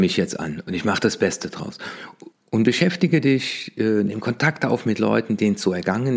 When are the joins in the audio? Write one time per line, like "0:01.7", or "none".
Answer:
0:02.3